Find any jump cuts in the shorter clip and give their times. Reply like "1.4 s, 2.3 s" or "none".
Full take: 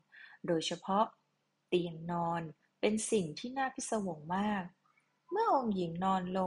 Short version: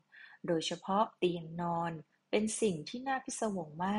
1.2 s